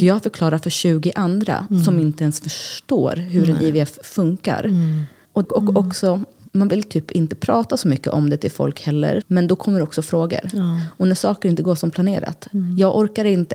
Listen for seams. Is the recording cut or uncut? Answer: cut